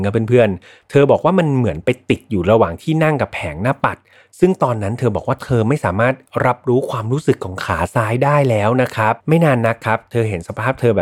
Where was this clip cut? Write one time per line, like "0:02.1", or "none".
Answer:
0:09.2